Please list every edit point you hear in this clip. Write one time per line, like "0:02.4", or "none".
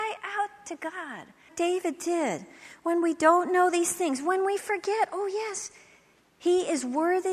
0:01.5